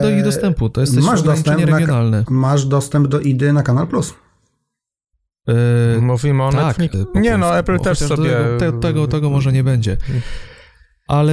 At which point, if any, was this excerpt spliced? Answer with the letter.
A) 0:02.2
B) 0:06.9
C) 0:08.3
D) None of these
B